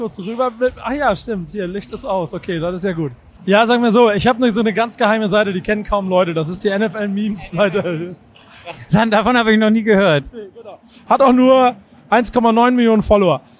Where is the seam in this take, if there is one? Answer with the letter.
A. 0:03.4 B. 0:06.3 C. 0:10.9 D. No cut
A